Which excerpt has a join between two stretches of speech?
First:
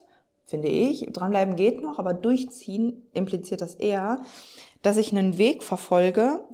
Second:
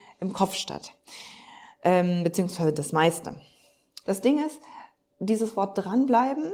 second; 1 cut; at 4.0 s

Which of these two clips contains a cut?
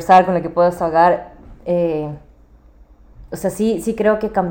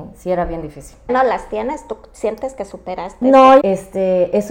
second; 2 cuts; at 1.1 s, 3.6 s

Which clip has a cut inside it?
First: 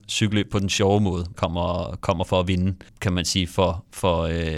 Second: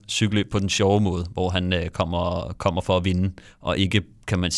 first; 2 cuts; at 1.3 s, 2.9 s

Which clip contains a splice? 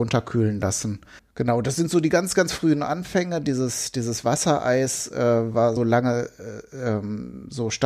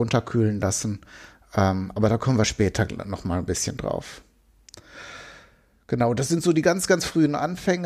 first; 2 cuts; at 1.2 s, 5.8 s

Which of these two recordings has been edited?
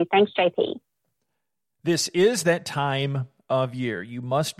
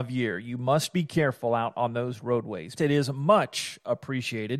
second; 1 cut; at 2.8 s

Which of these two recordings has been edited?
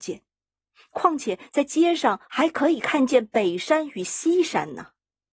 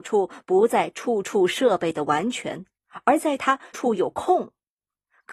second; 1 cut; at 3.7 s

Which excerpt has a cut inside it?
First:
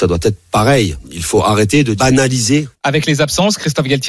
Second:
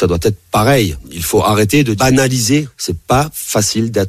first; 1 cut; at 2.7 s

